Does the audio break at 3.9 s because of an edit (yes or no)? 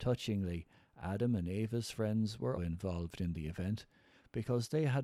no